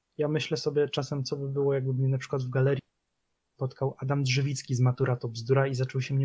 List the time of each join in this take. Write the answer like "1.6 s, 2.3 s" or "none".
none